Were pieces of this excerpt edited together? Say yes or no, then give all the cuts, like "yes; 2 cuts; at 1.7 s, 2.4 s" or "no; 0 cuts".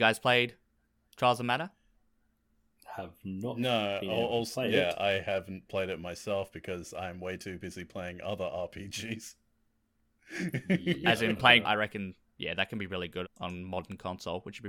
yes; 2 cuts; at 11.6 s, 13.2 s